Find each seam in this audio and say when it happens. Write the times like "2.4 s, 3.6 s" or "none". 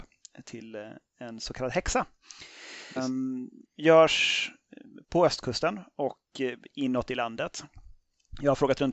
3.0 s, 5.0 s